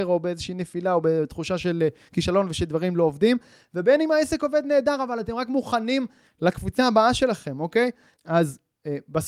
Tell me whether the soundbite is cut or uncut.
cut